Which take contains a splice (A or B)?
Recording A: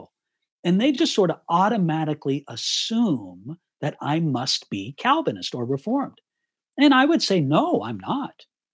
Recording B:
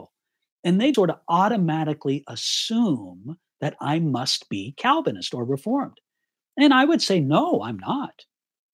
B